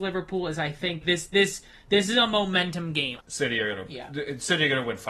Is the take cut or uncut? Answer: cut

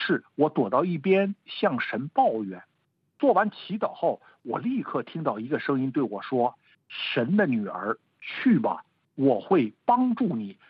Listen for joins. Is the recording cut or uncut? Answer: uncut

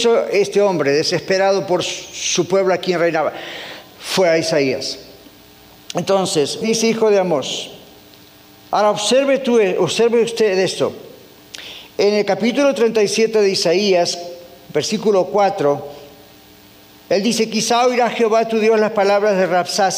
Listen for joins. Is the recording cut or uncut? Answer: cut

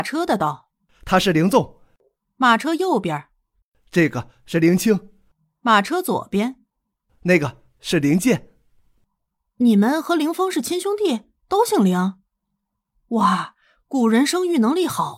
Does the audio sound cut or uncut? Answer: uncut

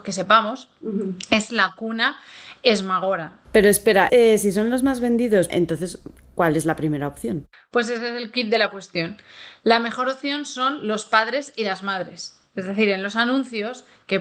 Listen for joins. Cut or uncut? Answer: cut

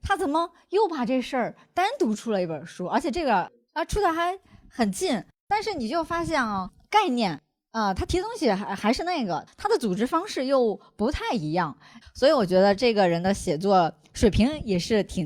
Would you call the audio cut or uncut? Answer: cut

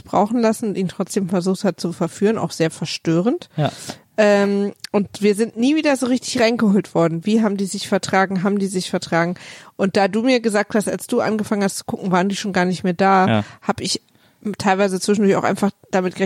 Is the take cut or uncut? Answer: uncut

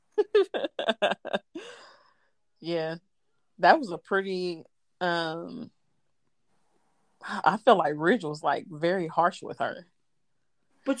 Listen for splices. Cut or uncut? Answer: uncut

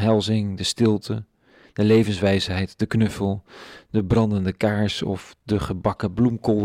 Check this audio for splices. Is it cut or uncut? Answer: uncut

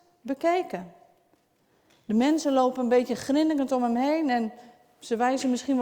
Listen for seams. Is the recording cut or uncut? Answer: uncut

